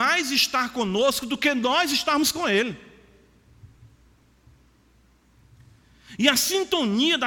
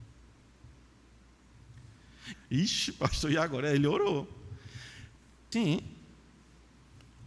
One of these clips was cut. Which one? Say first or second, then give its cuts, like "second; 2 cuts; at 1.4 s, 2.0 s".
second; 2 cuts; at 2.3 s, 5.5 s